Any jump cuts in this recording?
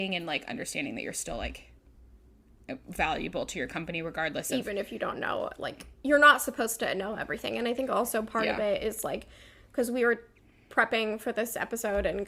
no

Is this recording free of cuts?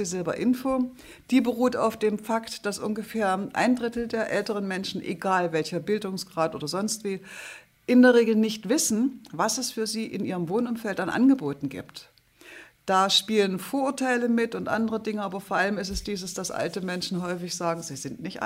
yes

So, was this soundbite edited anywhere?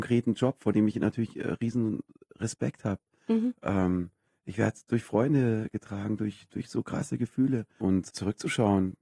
yes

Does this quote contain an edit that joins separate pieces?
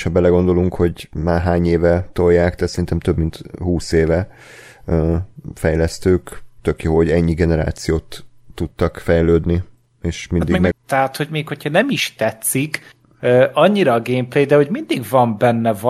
yes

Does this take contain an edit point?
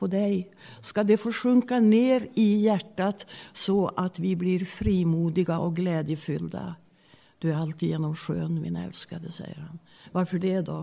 no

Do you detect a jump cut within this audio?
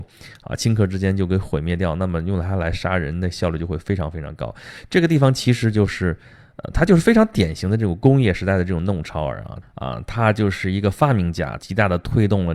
yes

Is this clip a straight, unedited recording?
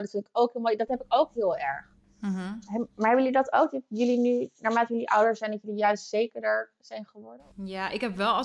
no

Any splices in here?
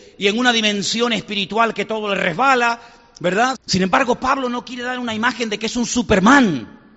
yes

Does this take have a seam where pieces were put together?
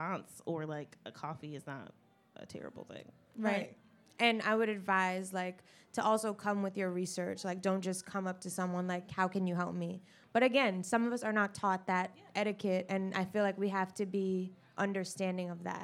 no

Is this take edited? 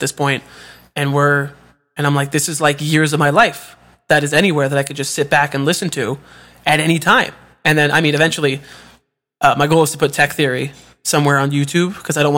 no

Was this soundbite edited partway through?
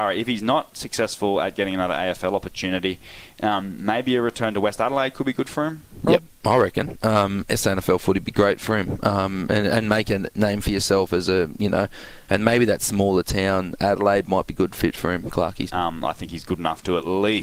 yes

